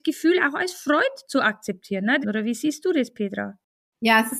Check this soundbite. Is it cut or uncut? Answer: cut